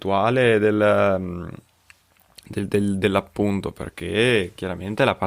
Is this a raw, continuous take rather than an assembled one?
yes; 0 cuts

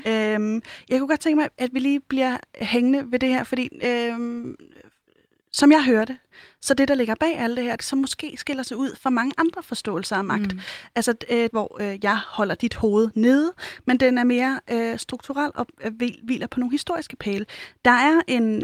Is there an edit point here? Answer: yes; 2 cuts; at 7.8 s, 11.5 s

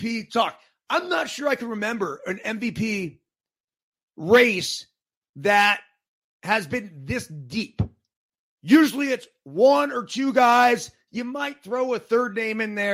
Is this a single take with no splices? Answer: yes; 0 cuts

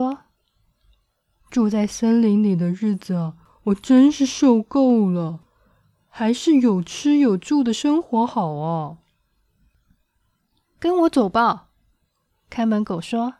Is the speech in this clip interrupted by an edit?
no; 0 cuts

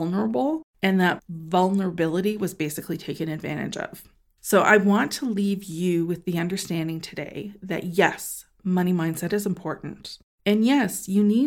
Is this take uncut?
yes; 0 cuts

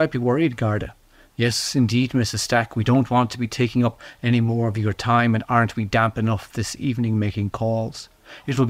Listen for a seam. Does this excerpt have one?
no; 0 cuts

